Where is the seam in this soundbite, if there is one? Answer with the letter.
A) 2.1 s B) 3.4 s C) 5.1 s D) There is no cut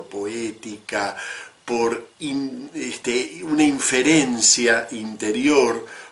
A